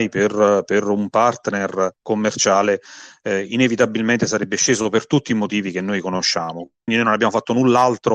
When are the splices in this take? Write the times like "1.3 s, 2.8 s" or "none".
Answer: 6.9 s